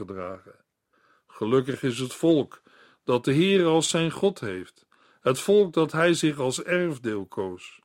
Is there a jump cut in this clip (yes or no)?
no